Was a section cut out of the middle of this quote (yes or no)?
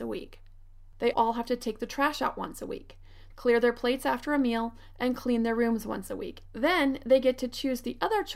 yes